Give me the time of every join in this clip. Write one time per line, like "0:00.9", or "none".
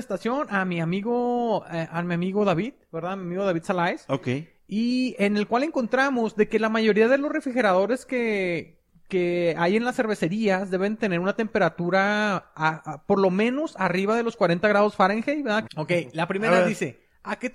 0:15.7